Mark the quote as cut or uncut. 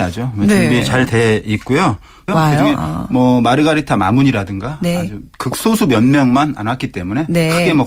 cut